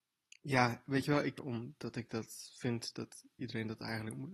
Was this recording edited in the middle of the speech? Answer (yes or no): yes